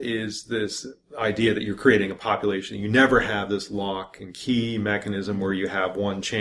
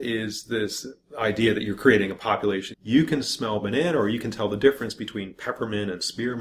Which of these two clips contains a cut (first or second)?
second